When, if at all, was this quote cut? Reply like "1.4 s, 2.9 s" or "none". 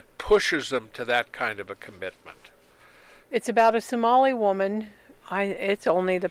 3.2 s, 5.1 s